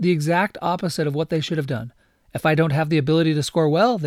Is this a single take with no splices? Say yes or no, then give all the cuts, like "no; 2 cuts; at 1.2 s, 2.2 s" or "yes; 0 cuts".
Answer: yes; 0 cuts